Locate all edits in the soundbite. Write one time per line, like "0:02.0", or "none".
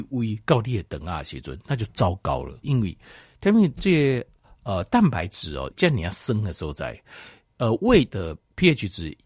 0:02.6
0:05.7